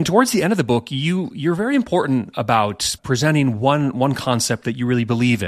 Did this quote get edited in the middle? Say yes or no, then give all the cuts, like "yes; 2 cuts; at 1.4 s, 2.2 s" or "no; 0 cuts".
yes; 1 cut; at 3.0 s